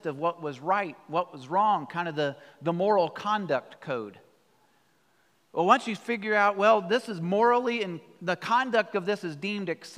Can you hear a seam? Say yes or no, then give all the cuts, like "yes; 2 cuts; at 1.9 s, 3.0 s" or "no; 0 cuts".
no; 0 cuts